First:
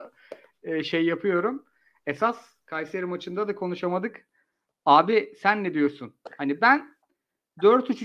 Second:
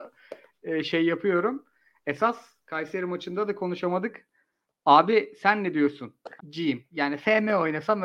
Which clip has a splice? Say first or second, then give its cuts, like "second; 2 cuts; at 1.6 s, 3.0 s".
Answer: second; 1 cut; at 6.4 s